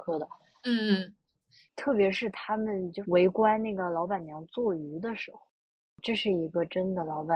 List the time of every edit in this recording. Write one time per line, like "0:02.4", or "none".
none